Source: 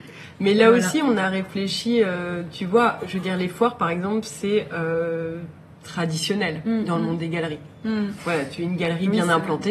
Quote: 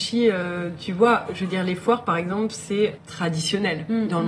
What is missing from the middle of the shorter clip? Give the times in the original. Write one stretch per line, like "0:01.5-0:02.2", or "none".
0:04.7-0:05.7